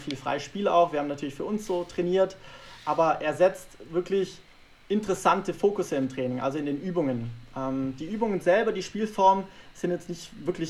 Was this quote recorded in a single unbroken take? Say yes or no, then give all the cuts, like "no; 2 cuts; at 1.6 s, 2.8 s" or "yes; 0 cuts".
yes; 0 cuts